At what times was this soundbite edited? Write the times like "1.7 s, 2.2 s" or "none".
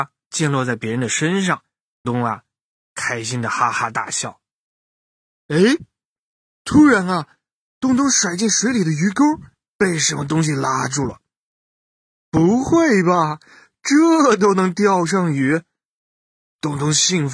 2.0 s